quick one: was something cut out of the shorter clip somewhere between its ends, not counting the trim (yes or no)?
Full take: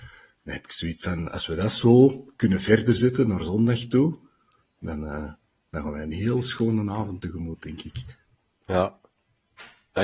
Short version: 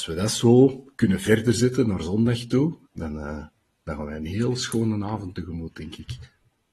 yes